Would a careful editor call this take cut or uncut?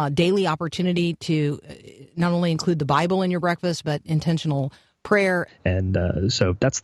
cut